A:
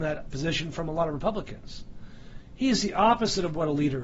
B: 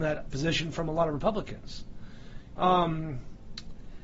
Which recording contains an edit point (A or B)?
B